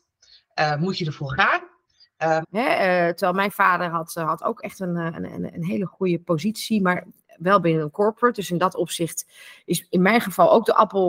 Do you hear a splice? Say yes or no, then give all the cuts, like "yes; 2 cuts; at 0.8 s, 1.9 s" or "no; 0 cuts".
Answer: yes; 1 cut; at 2.4 s